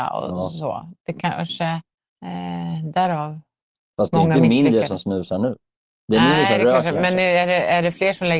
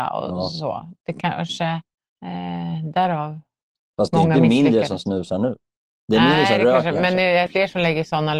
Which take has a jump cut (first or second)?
second